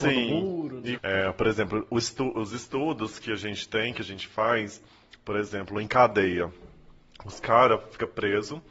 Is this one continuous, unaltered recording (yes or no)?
no